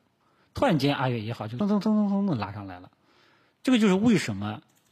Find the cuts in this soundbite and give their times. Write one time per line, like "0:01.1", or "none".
0:01.6